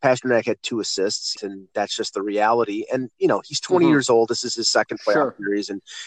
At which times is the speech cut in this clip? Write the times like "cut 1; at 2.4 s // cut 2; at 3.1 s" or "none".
cut 1; at 1.3 s